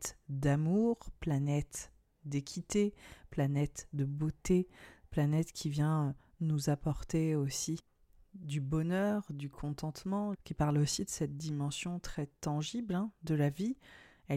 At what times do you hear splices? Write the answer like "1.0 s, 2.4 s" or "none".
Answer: 10.3 s